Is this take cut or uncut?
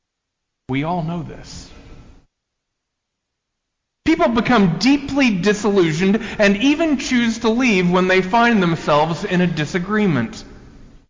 cut